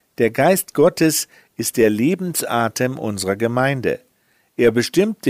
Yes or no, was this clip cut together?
no